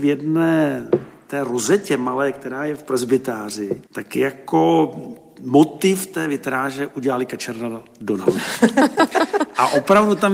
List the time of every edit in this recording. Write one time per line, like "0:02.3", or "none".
0:03.9